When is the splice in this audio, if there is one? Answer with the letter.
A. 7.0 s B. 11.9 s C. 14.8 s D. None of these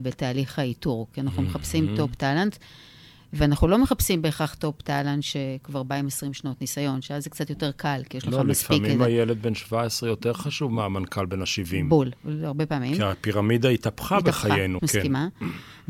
C